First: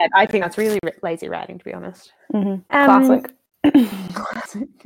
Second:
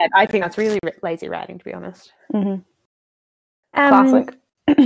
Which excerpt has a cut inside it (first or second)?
first